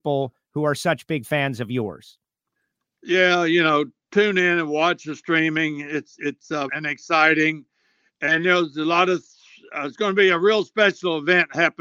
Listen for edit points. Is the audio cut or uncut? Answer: cut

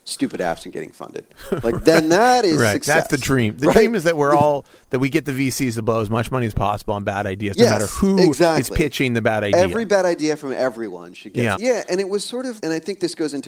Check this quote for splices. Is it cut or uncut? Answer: cut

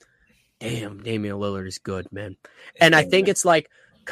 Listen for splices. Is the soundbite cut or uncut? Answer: uncut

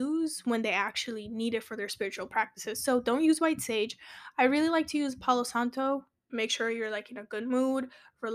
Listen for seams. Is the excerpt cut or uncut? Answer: cut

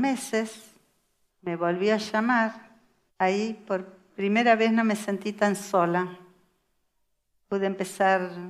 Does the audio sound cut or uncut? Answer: cut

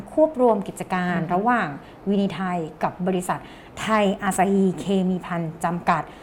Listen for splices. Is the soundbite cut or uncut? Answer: uncut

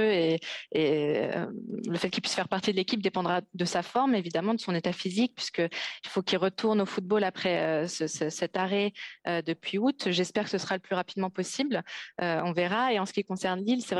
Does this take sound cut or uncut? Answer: uncut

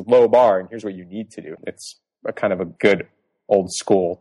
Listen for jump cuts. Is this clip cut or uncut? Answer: cut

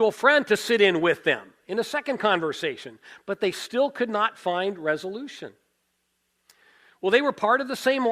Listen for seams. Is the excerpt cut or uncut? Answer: uncut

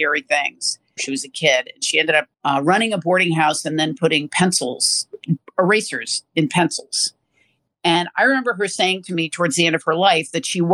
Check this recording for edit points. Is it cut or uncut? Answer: cut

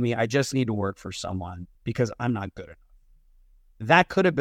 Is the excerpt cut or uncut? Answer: cut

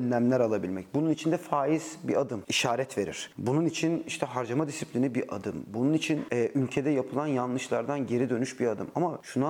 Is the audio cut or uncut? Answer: uncut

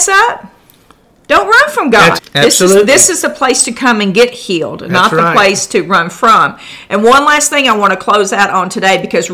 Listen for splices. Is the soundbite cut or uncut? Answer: cut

